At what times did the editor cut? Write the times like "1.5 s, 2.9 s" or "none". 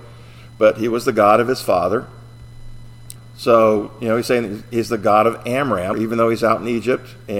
3.2 s, 5.9 s